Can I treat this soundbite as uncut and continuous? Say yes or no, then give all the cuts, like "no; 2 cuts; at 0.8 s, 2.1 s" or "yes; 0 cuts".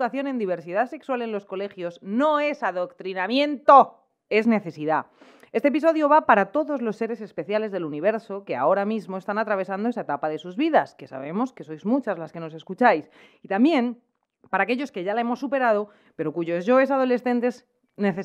yes; 0 cuts